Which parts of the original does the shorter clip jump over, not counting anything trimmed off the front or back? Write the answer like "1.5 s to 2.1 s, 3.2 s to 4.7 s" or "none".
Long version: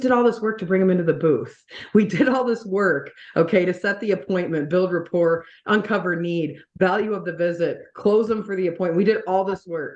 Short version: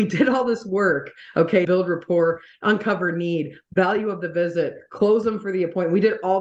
3.6 s to 4.7 s

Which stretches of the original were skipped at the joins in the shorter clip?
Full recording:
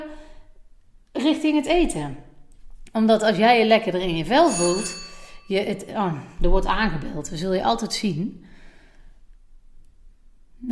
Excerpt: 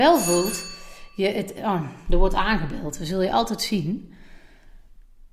none

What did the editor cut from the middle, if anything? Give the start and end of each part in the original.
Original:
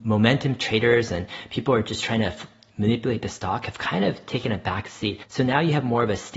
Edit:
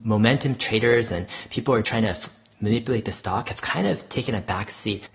1.8 s to 2.0 s

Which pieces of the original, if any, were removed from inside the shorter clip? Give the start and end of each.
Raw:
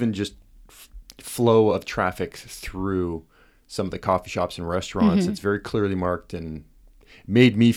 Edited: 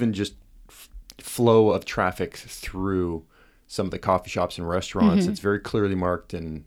none

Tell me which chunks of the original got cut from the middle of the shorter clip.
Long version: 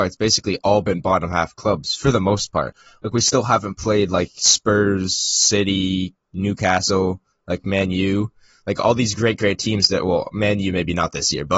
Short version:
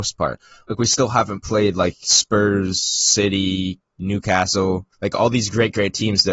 7.3 s to 8.6 s

